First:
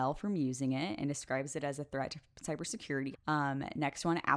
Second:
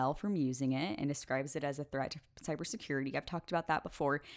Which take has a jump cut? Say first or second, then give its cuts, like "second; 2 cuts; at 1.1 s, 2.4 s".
first; 1 cut; at 3.1 s